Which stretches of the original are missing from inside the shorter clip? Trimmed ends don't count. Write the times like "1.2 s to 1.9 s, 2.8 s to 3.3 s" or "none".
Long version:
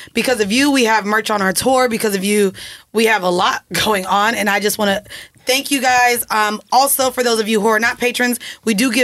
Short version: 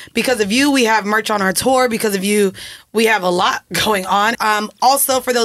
4.3 s to 6.2 s